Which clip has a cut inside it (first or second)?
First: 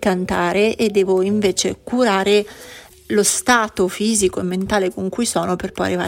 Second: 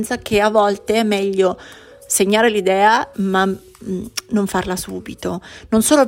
second